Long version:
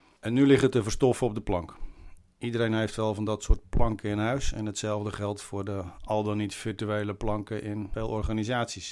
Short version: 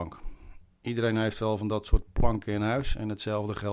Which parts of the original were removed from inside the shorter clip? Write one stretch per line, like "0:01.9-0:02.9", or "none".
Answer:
none